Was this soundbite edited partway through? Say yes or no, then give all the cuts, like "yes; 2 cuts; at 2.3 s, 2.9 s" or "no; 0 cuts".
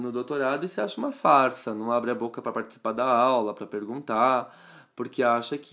no; 0 cuts